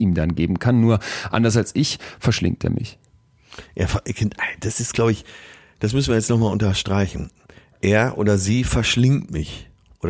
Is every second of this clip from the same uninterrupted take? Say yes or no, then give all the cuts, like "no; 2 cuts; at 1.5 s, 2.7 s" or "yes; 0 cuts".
yes; 0 cuts